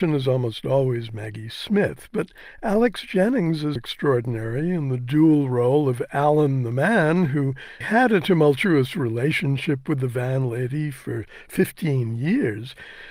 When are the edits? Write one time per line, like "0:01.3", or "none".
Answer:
0:03.8
0:07.8